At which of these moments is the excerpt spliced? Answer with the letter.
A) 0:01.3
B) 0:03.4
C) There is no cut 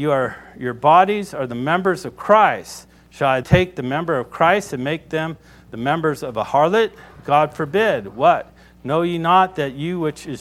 B